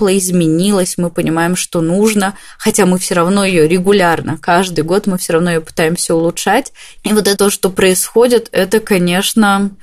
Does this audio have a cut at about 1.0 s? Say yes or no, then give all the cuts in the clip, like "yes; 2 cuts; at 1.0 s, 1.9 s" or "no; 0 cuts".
no; 1 cut; at 7.4 s